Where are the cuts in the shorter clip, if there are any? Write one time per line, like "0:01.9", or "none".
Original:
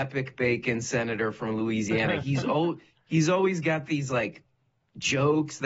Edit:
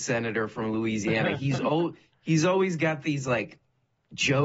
none